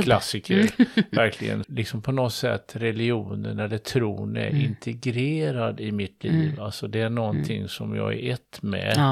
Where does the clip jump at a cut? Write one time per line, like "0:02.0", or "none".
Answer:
0:01.6